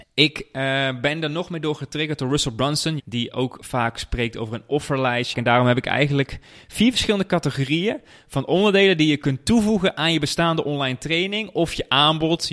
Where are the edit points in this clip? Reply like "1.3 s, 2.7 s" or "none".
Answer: 3.0 s, 5.3 s